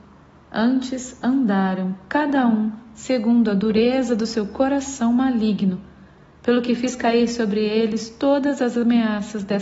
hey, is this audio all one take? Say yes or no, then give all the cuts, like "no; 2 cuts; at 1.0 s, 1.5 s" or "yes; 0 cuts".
yes; 0 cuts